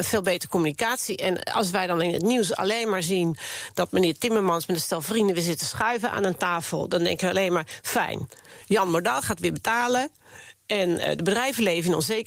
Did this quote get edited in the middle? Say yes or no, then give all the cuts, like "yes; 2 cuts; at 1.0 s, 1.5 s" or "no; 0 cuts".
no; 0 cuts